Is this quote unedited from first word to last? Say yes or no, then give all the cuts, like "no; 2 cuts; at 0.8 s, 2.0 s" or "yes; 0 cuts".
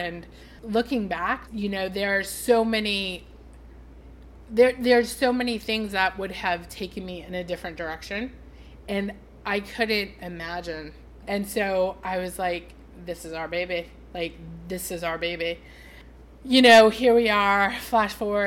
no; 2 cuts; at 1.5 s, 11.2 s